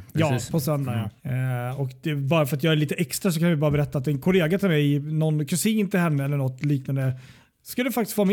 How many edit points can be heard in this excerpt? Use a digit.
1